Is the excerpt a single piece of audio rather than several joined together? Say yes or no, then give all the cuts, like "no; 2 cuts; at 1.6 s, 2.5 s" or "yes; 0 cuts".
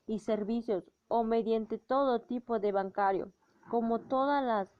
yes; 0 cuts